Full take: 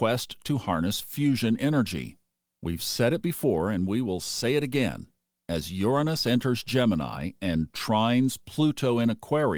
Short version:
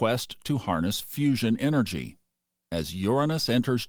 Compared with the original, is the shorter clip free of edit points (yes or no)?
no